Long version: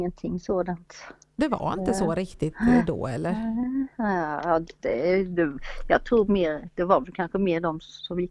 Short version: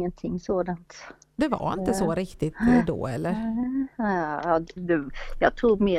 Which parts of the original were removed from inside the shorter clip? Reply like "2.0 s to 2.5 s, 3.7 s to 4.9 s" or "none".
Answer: 4.8 s to 5.2 s